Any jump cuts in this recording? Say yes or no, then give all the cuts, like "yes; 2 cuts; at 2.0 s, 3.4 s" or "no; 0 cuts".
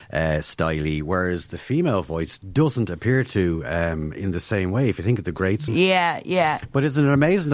yes; 1 cut; at 5.7 s